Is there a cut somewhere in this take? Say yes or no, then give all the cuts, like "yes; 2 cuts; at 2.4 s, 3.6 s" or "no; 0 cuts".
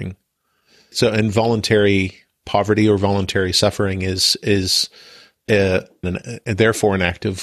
yes; 2 cuts; at 0.9 s, 6.0 s